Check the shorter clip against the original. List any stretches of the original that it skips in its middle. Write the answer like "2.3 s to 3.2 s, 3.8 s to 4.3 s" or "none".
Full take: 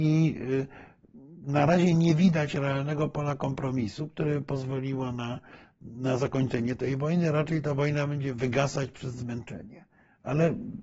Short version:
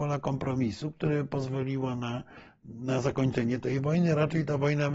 none